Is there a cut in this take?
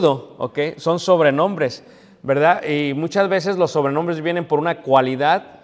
no; 0 cuts

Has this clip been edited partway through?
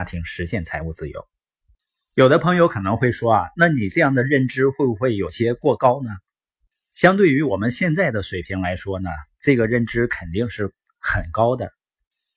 no; 0 cuts

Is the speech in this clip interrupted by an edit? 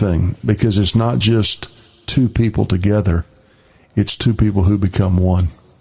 no; 0 cuts

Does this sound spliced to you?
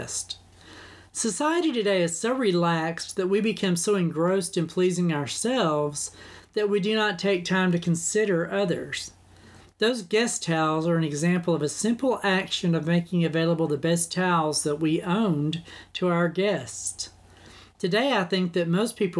no; 0 cuts

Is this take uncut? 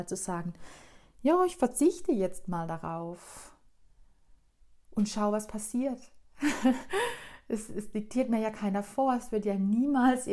yes; 0 cuts

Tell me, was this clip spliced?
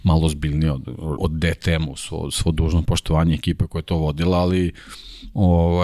yes; 1 cut; at 1.2 s

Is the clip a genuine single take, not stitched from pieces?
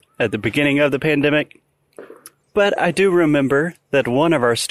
no; 1 cut; at 2.4 s

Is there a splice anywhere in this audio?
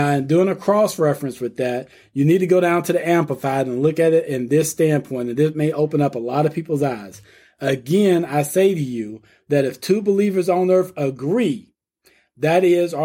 no; 0 cuts

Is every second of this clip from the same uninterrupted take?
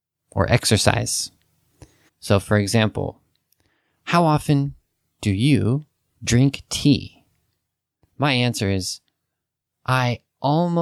no; 2 cuts; at 2.1 s, 8.0 s

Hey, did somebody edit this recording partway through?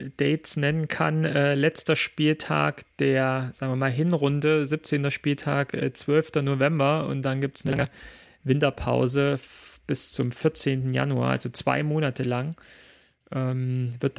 no; 0 cuts

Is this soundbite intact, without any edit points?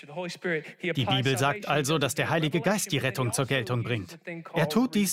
yes; 0 cuts

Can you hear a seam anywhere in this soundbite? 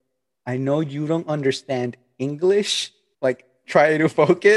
yes; 1 cut; at 3.1 s

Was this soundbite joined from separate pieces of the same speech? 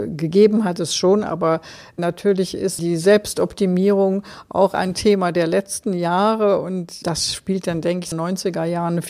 yes; 2 cuts; at 2.8 s, 8.1 s

